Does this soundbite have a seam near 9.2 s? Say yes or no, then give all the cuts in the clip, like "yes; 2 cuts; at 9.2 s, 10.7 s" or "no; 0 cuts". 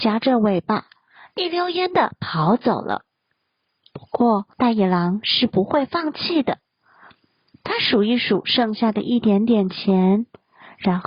no; 1 cut; at 4.5 s